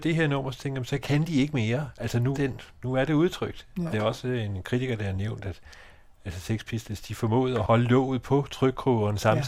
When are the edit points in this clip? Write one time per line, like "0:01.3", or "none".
0:02.3
0:03.9